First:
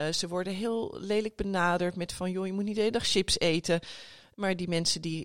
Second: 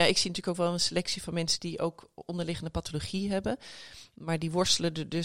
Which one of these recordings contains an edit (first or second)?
first